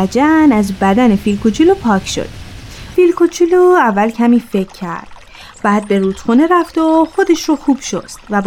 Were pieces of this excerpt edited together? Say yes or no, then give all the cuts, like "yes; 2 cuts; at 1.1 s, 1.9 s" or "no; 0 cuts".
yes; 1 cut; at 2.9 s